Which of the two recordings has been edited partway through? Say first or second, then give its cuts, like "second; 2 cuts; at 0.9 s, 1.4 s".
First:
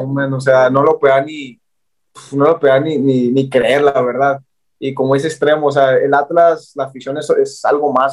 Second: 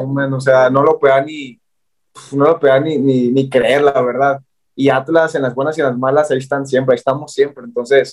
second; 1 cut; at 4.7 s